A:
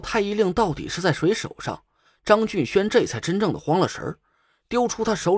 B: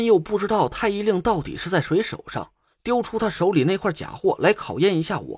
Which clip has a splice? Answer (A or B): B